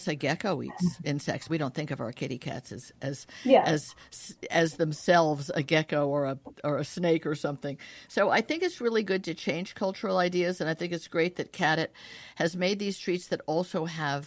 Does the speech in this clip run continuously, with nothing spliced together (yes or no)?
no